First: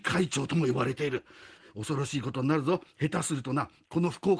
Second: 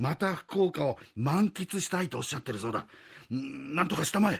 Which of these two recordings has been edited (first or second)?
first